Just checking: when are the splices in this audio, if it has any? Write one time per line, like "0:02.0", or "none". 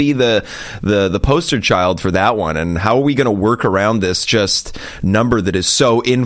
none